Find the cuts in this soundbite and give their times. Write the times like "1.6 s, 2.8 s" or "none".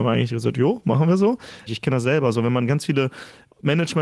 1.7 s